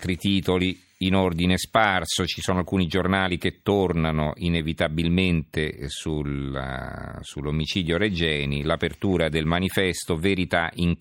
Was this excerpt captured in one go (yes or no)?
yes